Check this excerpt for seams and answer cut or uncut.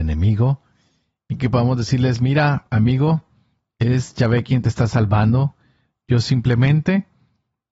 uncut